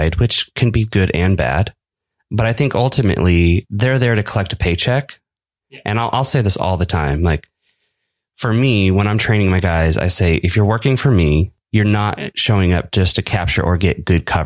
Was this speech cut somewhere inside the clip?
no; 0 cuts

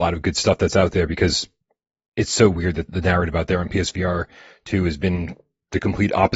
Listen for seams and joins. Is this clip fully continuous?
no; 1 cut; at 2.9 s

